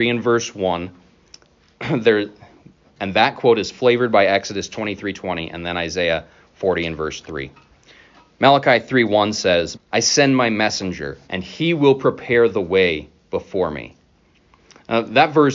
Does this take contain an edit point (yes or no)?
yes